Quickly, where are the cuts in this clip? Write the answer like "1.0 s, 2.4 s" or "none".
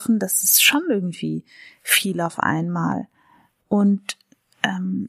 none